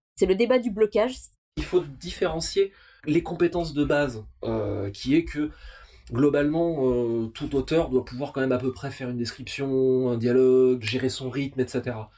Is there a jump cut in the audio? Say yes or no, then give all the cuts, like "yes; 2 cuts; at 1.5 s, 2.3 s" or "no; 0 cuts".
yes; 2 cuts; at 1.4 s, 10.8 s